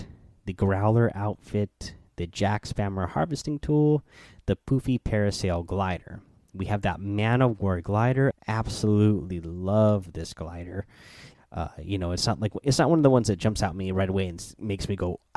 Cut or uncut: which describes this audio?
cut